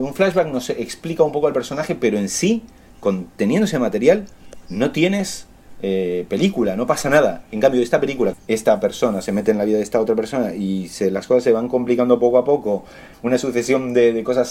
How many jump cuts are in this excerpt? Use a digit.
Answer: 2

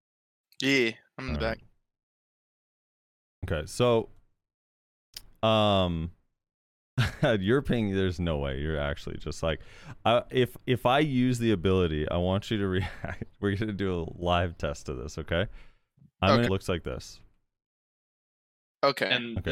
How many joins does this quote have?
1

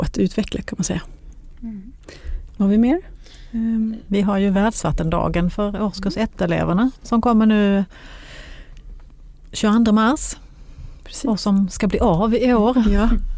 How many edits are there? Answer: 0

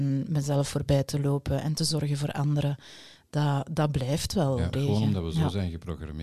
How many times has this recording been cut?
1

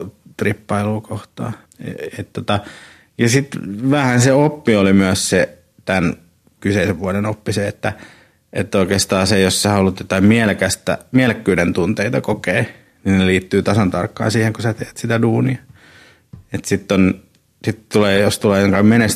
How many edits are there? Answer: 1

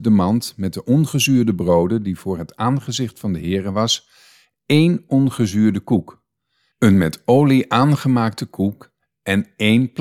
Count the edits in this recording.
0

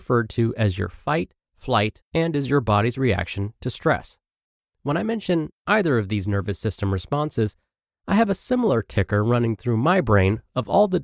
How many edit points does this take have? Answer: 2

